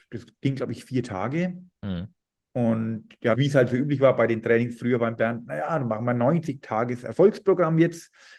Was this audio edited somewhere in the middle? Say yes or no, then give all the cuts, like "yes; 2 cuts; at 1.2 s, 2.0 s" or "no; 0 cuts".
yes; 1 cut; at 3.3 s